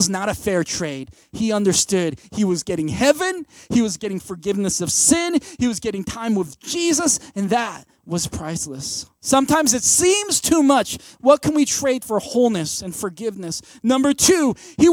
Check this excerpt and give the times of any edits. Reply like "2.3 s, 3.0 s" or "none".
9.2 s, 11.1 s

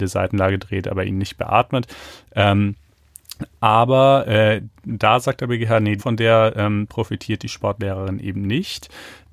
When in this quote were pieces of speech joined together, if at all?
6.0 s

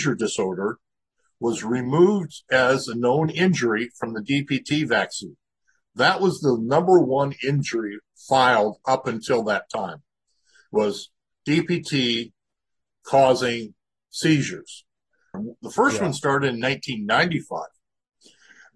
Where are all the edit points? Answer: 15.3 s

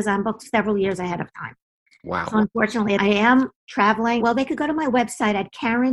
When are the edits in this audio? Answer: 3.0 s, 4.2 s

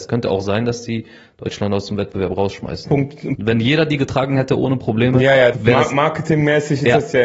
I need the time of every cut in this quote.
3.4 s, 5.5 s

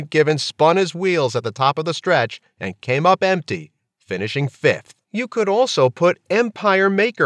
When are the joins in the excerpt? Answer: 5.0 s

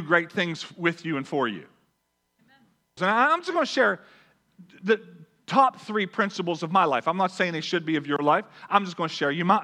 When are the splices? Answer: 3.0 s

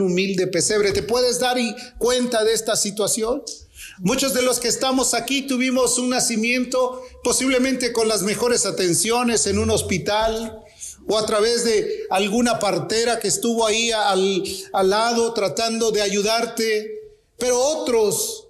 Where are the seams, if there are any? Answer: none

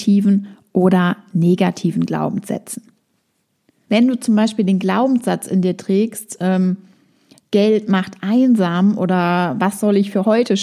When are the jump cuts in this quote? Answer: 3.8 s

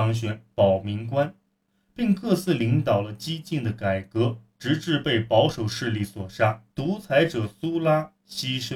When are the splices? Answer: 6.7 s

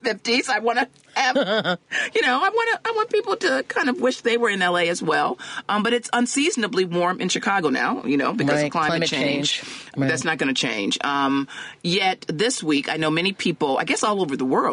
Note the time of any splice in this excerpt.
10.0 s

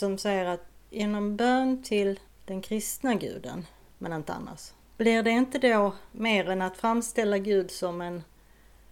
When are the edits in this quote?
3.9 s, 6.1 s

